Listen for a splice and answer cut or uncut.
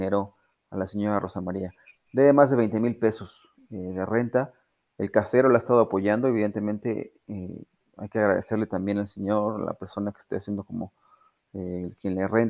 uncut